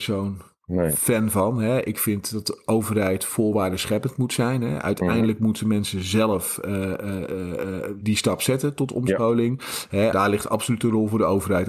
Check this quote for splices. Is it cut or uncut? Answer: cut